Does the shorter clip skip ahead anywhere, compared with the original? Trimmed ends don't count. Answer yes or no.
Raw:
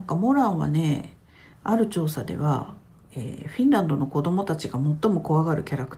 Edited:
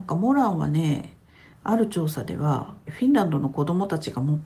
yes